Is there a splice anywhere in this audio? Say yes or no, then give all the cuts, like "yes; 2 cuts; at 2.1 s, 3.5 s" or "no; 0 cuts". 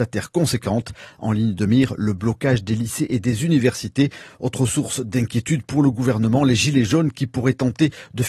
no; 0 cuts